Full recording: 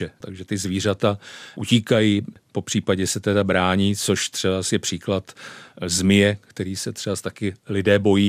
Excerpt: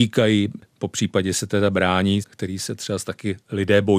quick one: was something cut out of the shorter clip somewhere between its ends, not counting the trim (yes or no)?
yes